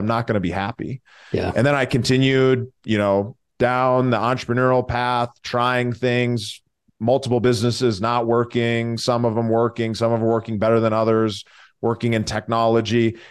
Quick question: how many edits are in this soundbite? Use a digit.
0